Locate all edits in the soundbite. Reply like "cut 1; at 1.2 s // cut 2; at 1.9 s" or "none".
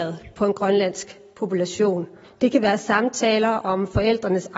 cut 1; at 2.2 s